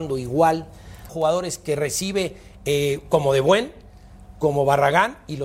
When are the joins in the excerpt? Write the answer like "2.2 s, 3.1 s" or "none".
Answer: 1.1 s